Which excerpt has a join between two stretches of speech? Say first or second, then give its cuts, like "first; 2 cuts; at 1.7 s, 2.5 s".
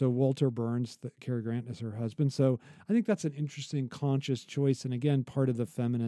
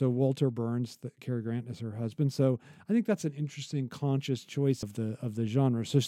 second; 1 cut; at 4.8 s